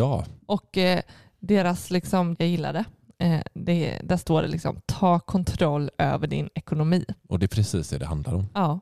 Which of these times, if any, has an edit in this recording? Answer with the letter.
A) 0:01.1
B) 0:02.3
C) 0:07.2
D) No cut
B